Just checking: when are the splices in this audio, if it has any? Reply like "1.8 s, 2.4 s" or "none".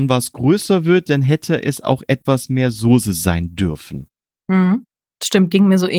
none